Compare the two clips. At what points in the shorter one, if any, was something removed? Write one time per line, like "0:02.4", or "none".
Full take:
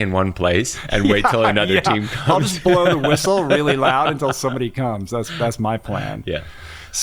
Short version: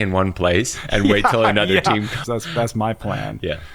0:02.2